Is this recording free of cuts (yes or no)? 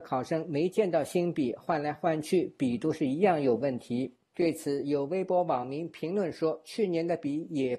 no